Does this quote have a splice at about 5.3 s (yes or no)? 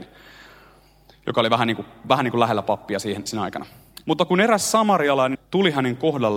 yes